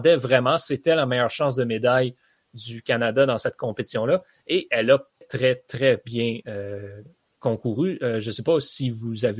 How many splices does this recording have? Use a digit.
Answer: 1